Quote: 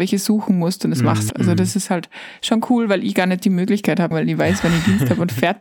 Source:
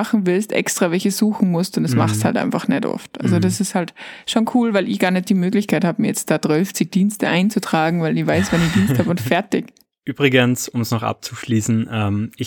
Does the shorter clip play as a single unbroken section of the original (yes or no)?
no